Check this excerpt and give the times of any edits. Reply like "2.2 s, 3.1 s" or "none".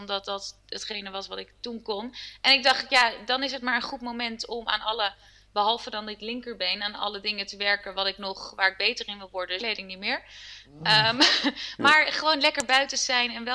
9.6 s